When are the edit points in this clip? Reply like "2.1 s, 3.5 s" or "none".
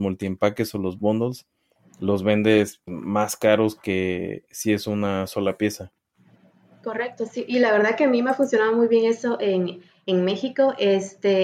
2.9 s